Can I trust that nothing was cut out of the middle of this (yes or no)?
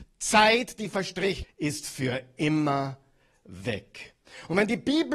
no